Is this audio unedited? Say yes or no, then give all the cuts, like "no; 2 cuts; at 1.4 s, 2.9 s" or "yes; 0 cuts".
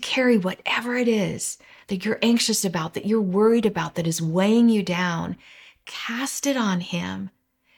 yes; 0 cuts